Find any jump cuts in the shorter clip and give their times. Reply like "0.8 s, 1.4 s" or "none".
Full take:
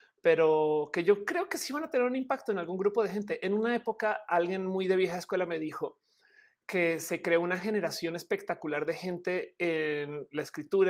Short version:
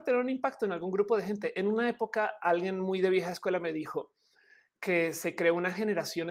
none